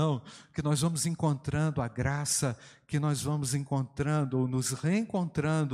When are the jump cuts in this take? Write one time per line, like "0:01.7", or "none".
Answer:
none